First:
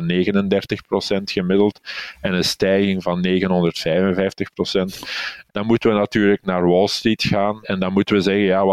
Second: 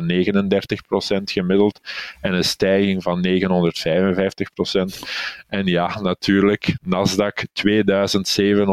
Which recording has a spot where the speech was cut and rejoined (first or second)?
first